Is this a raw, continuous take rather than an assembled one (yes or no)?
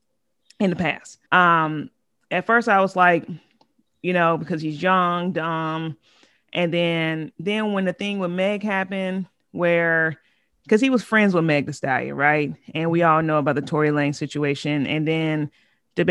no